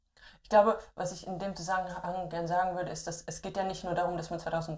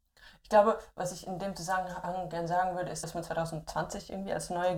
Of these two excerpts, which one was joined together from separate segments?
second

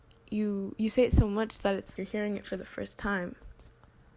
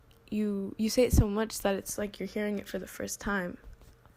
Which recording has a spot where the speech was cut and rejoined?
first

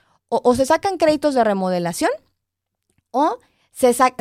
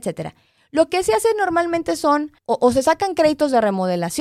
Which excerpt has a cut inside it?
second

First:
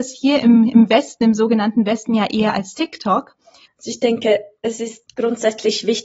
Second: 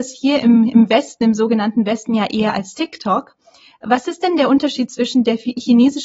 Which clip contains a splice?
first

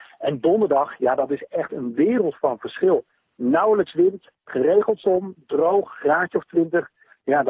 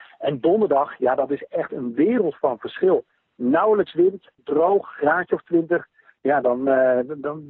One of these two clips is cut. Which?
second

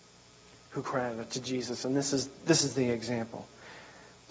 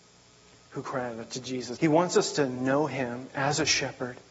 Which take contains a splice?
second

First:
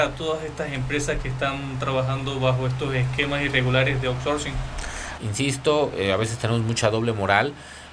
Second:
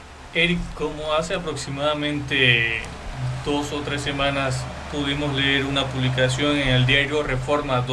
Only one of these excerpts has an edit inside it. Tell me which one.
first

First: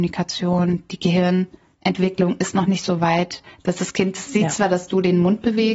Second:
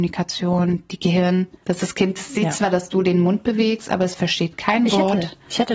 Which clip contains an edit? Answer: second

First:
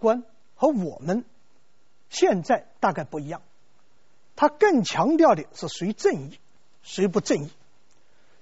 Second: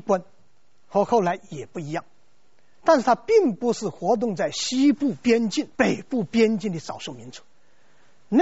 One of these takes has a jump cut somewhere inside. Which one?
second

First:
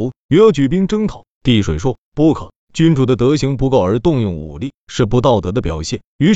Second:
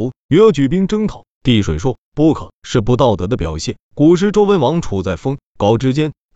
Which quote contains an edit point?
second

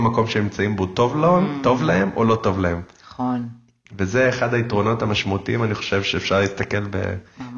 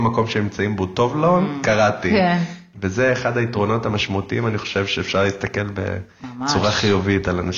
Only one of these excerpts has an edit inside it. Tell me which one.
second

